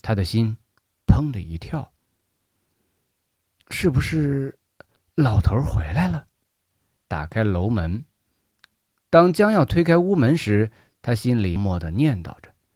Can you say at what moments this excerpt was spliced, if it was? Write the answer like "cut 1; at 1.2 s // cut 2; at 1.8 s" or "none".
cut 1; at 7.0 s // cut 2; at 11.6 s